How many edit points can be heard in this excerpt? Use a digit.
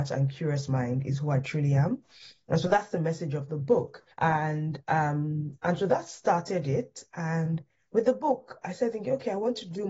1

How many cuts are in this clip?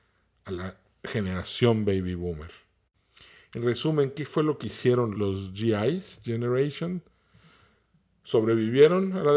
1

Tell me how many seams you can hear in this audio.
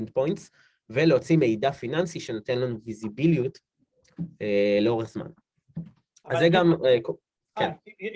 0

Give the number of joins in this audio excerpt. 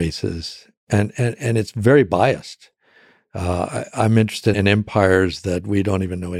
1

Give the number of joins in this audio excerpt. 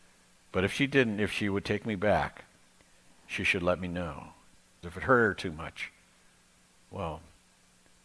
1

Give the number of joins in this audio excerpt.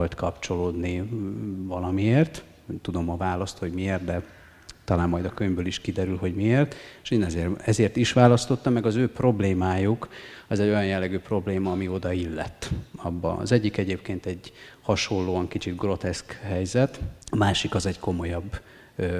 1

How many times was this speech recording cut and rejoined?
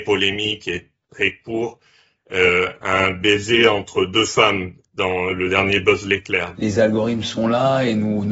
1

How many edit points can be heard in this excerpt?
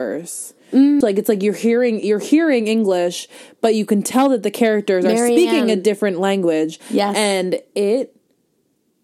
1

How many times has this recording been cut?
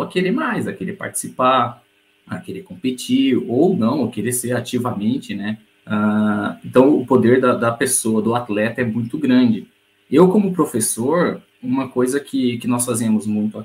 1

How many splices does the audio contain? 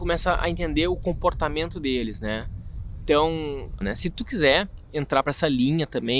1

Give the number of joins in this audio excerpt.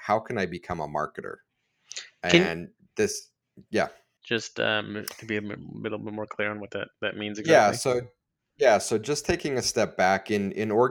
1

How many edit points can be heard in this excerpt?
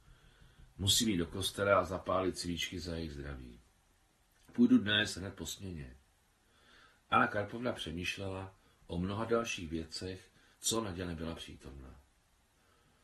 1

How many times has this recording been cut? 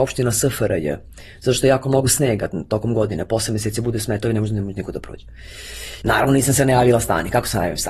1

